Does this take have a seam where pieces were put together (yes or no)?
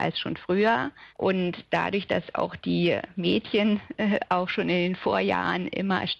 yes